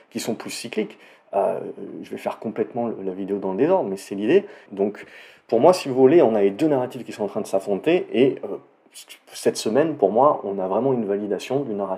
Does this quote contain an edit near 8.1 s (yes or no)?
no